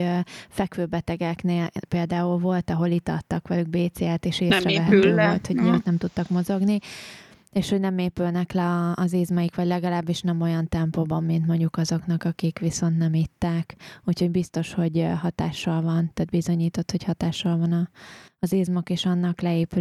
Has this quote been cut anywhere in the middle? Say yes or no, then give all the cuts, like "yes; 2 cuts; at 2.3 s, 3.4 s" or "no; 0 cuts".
no; 0 cuts